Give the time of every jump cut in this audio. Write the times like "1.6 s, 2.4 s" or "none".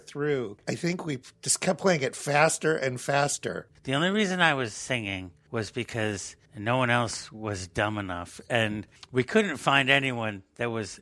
3.7 s